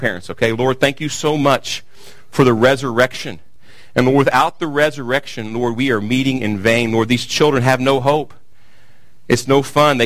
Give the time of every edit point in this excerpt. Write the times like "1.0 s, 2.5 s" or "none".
none